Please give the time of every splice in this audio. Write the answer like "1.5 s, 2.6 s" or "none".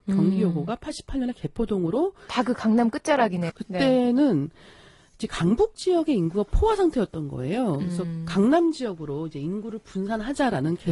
3.5 s